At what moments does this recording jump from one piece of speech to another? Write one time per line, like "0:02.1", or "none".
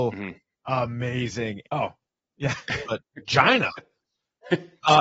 0:01.6
0:02.8